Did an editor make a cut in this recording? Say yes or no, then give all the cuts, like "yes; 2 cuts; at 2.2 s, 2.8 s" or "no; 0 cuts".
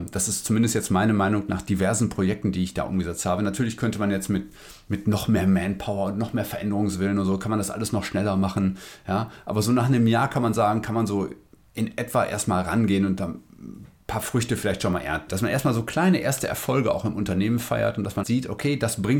yes; 2 cuts; at 15.3 s, 18.2 s